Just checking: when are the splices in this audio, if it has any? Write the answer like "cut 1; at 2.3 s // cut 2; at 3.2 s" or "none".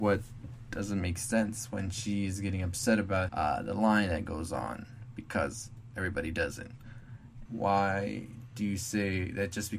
cut 1; at 3.3 s // cut 2; at 7.5 s

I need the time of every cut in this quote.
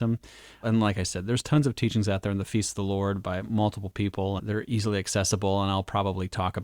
cut 1; at 4.4 s

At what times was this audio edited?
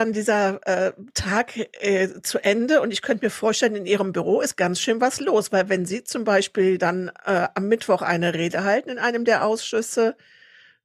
none

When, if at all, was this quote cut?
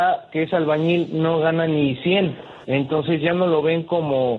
cut 1; at 2.6 s

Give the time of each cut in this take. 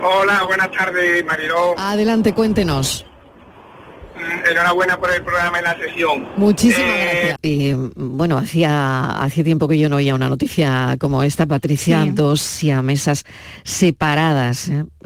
cut 1; at 7.4 s

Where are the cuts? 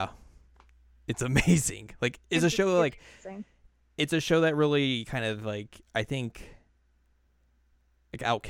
none

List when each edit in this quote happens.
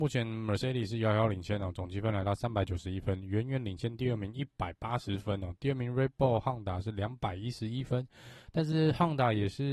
none

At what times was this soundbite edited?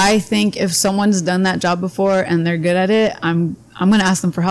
none

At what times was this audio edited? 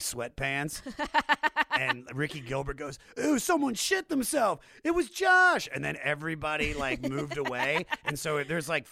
none

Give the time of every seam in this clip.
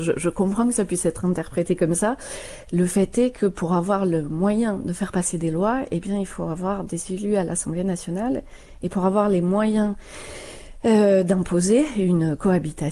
none

